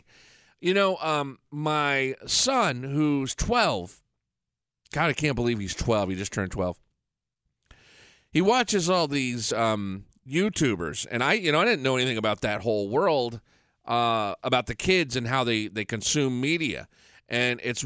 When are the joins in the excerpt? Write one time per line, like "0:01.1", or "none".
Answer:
none